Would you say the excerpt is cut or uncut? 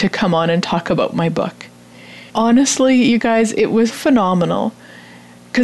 cut